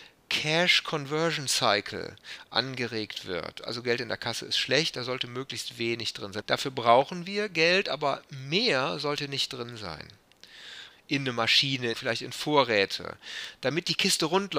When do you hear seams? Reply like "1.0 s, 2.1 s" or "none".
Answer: 6.4 s, 10.9 s, 11.9 s